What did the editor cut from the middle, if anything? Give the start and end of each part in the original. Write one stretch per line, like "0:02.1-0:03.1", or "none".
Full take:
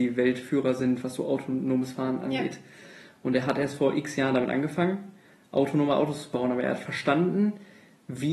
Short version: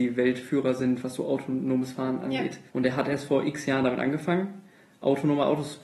0:02.7-0:03.2